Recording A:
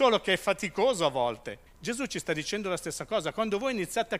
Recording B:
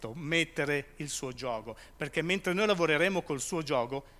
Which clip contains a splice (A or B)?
A